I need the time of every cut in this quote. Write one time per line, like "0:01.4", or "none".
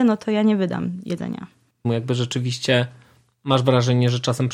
0:01.8